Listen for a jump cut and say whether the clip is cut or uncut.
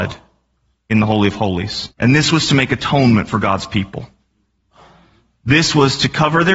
cut